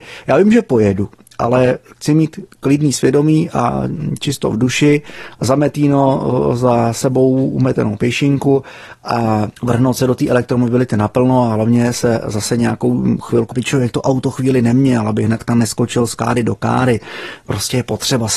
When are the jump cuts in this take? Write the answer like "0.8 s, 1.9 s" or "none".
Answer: 9.6 s, 13.5 s